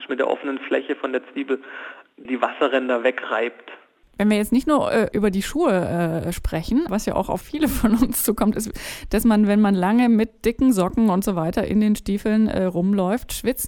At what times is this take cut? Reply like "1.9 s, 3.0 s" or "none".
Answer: 6.9 s